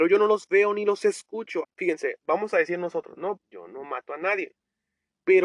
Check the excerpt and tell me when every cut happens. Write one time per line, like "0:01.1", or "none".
0:01.6
0:03.4